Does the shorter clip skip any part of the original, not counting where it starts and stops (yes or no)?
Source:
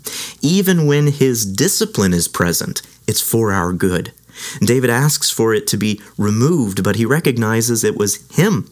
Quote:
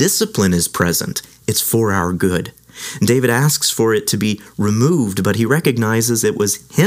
no